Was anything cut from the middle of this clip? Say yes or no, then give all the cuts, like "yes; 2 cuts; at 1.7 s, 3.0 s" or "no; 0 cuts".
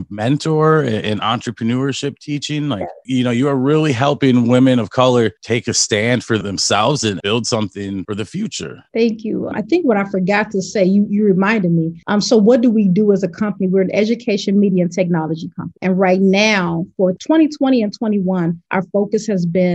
no; 0 cuts